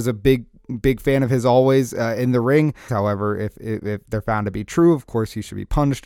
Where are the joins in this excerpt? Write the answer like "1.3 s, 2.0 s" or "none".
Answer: 2.9 s